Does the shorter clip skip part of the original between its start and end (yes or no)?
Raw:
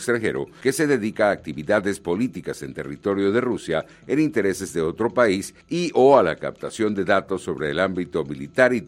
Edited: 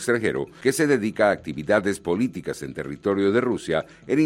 no